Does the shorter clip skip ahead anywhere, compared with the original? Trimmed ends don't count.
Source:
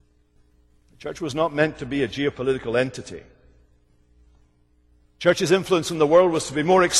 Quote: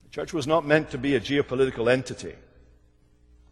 no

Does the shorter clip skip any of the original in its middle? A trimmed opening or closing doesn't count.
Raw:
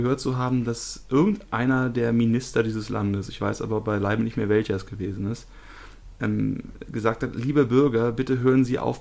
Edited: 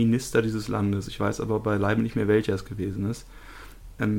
no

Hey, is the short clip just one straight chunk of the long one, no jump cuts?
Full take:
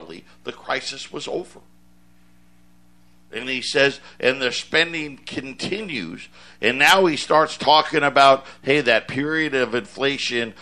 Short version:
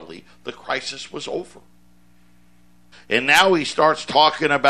no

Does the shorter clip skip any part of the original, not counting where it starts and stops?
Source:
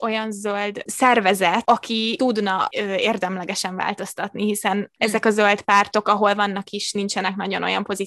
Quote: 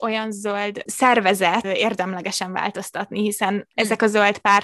yes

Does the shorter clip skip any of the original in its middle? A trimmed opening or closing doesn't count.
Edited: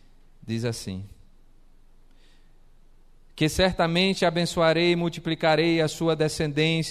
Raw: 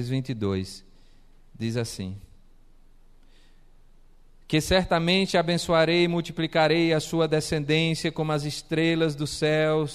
no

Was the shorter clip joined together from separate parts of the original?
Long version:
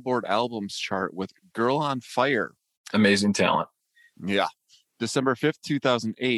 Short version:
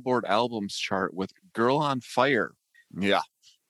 yes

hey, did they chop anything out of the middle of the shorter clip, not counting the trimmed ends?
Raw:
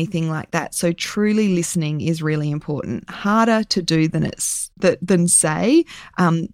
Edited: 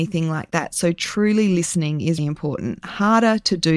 yes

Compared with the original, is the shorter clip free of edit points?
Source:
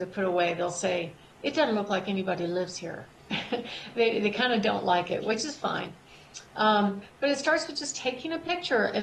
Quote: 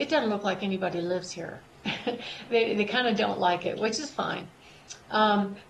yes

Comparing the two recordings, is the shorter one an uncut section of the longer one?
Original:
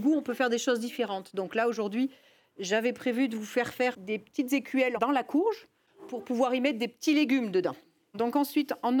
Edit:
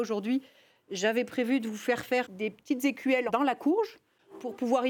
yes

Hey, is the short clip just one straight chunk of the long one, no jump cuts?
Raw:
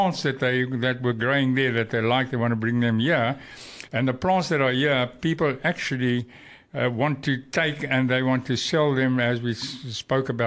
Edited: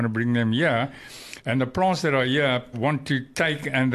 no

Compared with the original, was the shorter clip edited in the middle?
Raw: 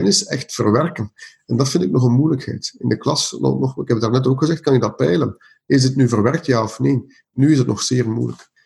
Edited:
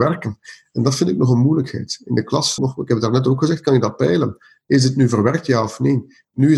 yes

